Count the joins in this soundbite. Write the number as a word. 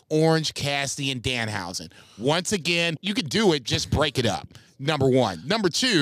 one